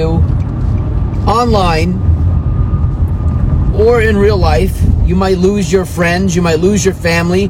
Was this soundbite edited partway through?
yes; 1 cut; at 3.7 s

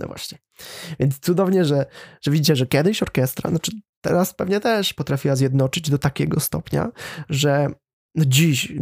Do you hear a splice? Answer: no; 0 cuts

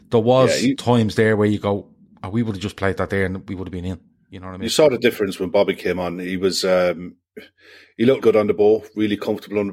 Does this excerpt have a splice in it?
yes; 1 cut; at 8.2 s

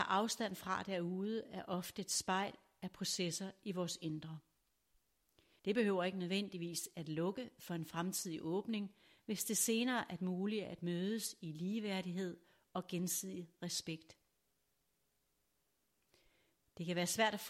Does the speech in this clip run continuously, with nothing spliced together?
no; 1 cut; at 5.6 s

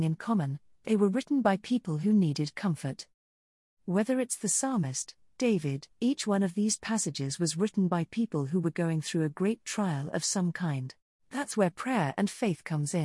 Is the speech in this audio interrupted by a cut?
yes; 2 cuts; at 5.9 s, 11.2 s

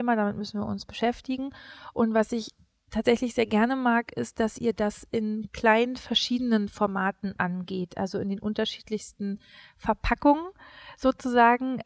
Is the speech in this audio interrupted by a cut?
no; 0 cuts

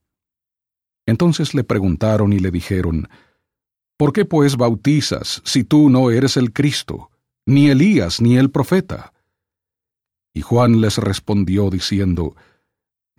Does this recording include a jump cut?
no; 0 cuts

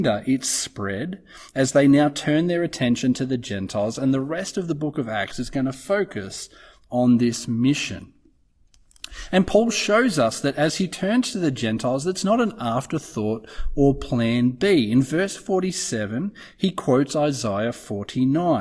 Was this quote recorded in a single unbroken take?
yes; 0 cuts

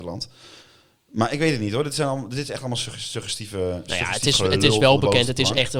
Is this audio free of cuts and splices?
yes; 0 cuts

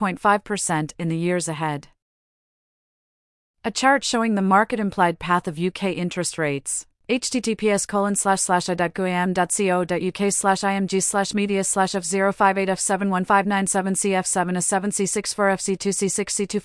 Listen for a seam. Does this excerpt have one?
no; 0 cuts

